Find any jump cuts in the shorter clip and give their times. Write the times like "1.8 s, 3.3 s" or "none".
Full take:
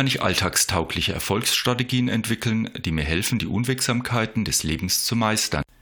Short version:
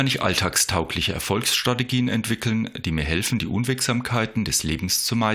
none